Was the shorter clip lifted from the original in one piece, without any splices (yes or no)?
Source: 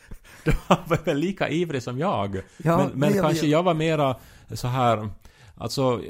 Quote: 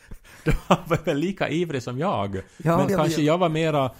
no